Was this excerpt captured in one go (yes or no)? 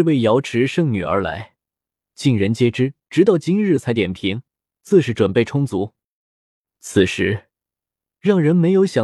no